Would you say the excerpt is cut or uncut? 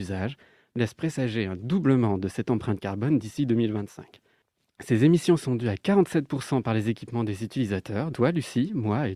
cut